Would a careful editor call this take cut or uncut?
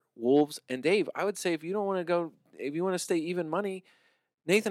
uncut